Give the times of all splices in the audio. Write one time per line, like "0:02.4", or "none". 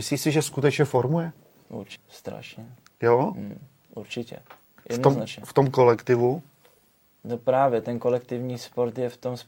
0:02.0